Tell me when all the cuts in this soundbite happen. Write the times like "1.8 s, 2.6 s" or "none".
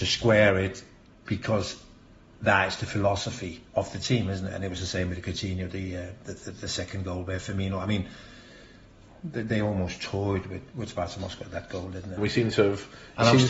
3.7 s, 12.2 s